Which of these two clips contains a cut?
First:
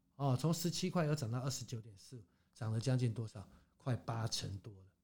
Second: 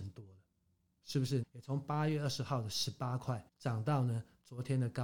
second; 2 cuts; at 1.4 s, 3.5 s

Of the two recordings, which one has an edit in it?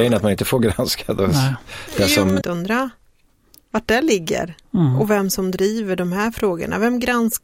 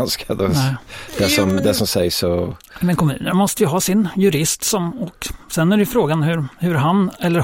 first; 1 cut; at 2.4 s

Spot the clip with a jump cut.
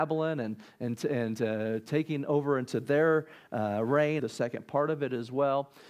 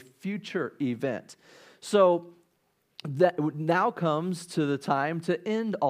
first; 1 cut; at 4.2 s

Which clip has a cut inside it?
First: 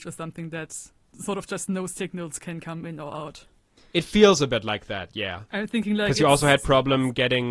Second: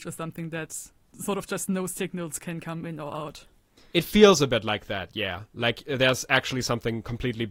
first; 1 cut; at 5.5 s

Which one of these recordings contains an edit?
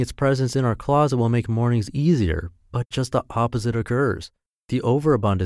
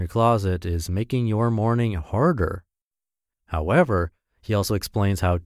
second; 1 cut; at 3.3 s

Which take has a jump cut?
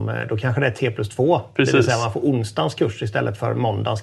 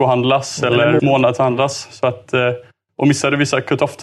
second; 1 cut; at 1.0 s

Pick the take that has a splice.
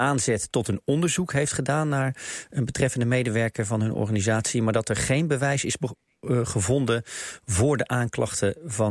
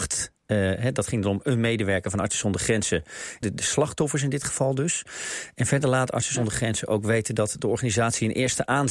second; 1 cut; at 3.4 s

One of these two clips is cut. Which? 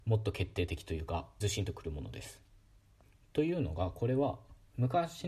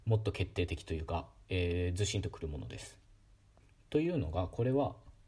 first; 1 cut; at 1.4 s

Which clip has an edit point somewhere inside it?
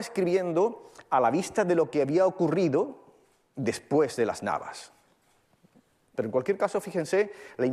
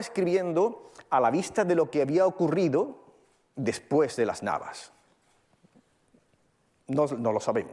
first; 1 cut; at 6.2 s

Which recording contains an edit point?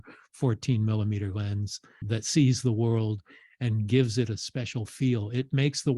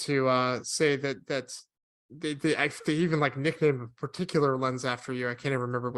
first; 1 cut; at 2.0 s

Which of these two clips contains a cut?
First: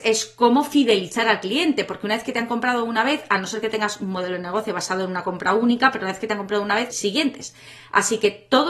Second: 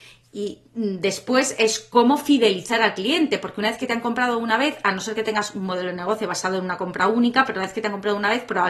first; 1 cut; at 6.9 s

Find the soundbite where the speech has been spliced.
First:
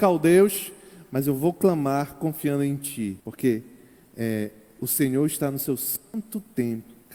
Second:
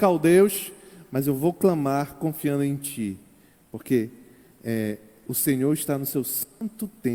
first; 1 cut; at 3.2 s

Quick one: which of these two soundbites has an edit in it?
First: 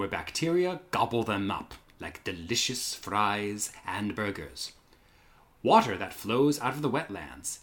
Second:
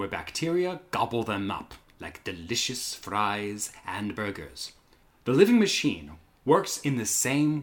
second; 1 cut; at 5.0 s

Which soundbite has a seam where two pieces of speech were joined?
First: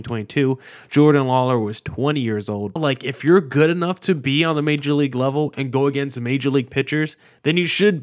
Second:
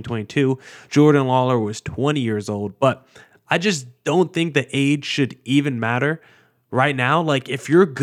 first; 1 cut; at 2.8 s

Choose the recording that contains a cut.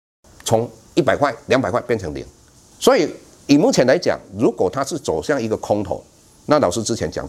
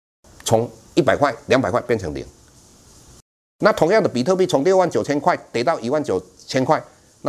first; 1 cut; at 2.7 s

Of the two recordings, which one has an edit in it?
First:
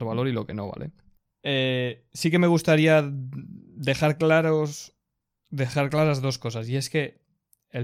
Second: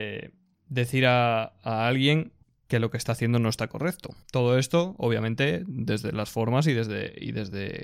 second; 1 cut; at 4.2 s

